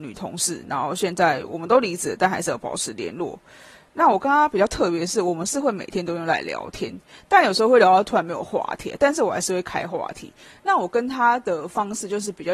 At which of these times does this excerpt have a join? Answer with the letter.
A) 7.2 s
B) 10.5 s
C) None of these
C